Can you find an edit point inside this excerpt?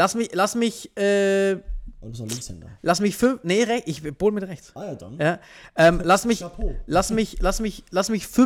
no; 0 cuts

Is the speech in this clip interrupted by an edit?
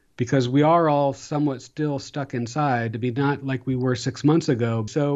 no; 0 cuts

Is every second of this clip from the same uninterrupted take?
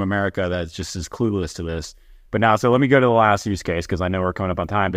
yes; 0 cuts

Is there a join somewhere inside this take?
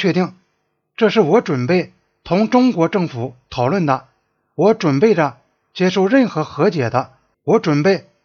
yes; 1 cut; at 7.3 s

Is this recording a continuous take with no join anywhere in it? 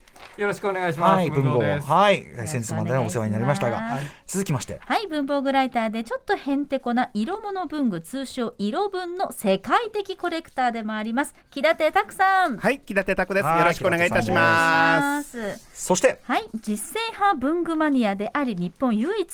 yes; 0 cuts

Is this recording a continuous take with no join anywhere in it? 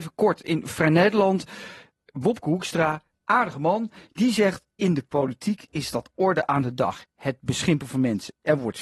yes; 0 cuts

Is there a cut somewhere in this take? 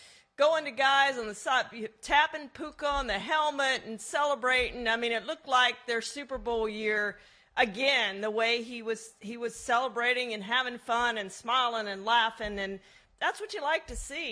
no; 0 cuts

